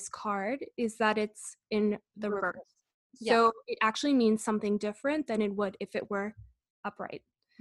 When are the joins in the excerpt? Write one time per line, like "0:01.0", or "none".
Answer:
none